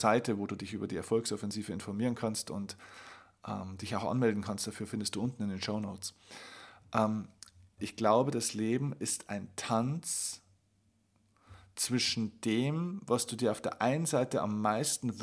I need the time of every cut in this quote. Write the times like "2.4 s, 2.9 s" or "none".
7.8 s